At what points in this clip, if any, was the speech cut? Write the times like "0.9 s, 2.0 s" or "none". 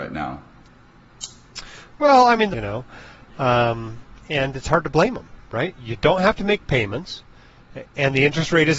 2.5 s